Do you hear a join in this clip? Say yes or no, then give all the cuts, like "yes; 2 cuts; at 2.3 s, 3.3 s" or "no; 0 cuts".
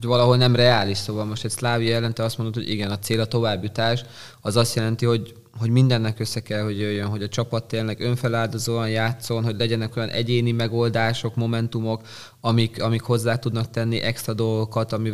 no; 0 cuts